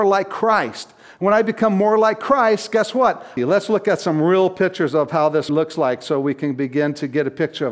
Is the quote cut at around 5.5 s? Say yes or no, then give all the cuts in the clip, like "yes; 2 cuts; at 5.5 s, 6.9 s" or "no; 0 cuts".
yes; 2 cuts; at 3.4 s, 5.5 s